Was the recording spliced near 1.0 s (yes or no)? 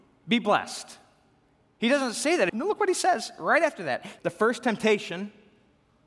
no